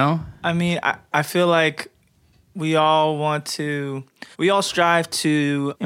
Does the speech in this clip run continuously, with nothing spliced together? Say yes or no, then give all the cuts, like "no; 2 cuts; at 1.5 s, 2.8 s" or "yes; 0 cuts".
no; 1 cut; at 4.3 s